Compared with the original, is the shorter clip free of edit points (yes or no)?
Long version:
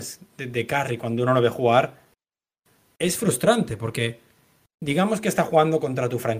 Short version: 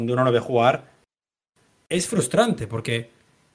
yes